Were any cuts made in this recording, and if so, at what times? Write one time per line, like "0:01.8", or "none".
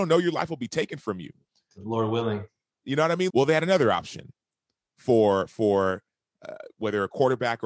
0:03.3